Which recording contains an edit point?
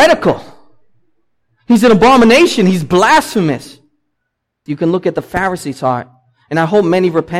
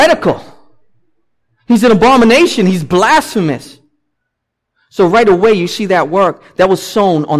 first; 1 cut; at 4.7 s

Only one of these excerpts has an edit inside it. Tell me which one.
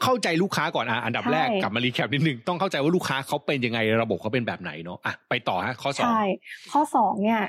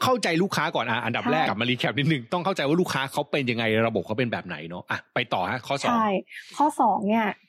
second; 1 cut; at 1.5 s

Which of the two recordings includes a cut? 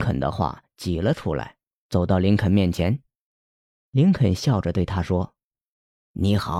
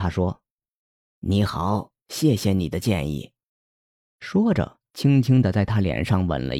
second; 2 cuts; at 3.5 s, 4.9 s

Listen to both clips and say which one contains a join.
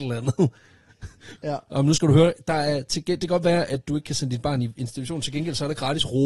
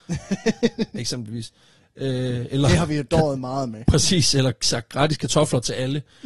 first; 1 cut; at 1.4 s

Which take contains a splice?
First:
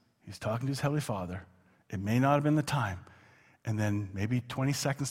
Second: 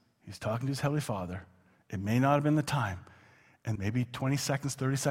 second; 1 cut; at 3.8 s

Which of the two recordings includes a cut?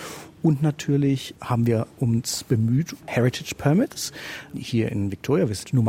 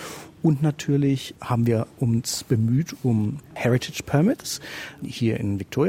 first; 1 cut; at 3.0 s

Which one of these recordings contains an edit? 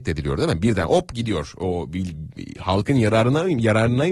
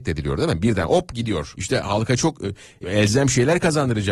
second; 2 cuts; at 1.5 s, 2.8 s

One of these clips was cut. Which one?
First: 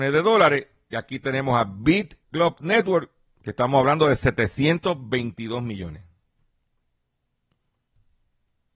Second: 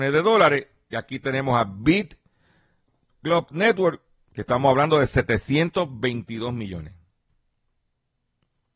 first; 1 cut; at 2.2 s

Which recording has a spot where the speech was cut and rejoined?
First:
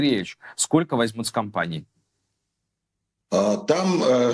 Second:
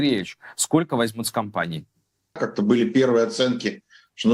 second; 1 cut; at 2.4 s

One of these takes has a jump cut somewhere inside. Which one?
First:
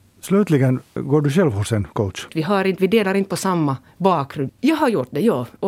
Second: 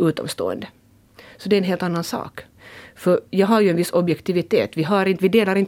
first; 3 cuts; at 1.0 s, 2.3 s, 4.5 s

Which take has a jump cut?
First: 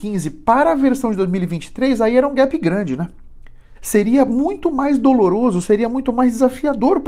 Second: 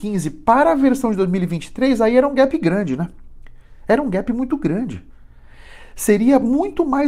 first; 1 cut; at 3.8 s

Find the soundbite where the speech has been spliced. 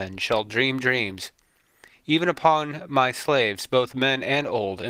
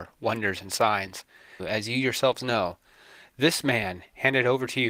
second; 1 cut; at 1.6 s

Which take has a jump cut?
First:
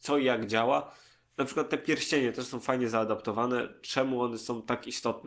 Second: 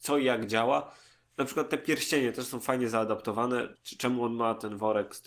second; 1 cut; at 3.8 s

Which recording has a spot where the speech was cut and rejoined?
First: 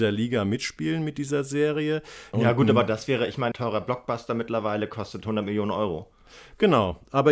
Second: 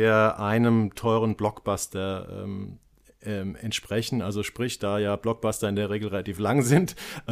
first; 2 cuts; at 2.3 s, 3.5 s

